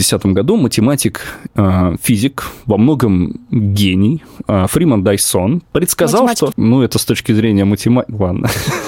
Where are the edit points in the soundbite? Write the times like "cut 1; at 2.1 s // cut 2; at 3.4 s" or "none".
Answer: cut 1; at 6.5 s